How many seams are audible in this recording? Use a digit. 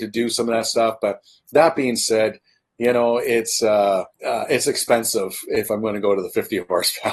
1